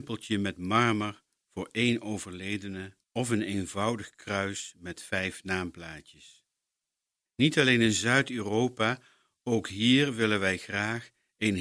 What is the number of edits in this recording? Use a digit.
2